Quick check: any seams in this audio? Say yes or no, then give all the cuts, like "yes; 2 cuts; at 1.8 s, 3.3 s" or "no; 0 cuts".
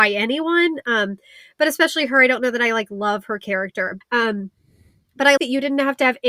yes; 2 cuts; at 4.0 s, 5.4 s